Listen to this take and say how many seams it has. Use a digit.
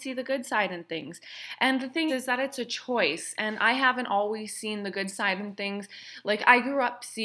1